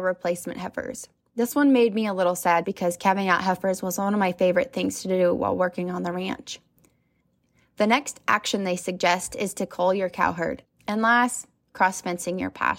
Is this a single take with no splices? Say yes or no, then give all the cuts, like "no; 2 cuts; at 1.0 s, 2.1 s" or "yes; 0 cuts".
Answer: no; 2 cuts; at 2.6 s, 10.6 s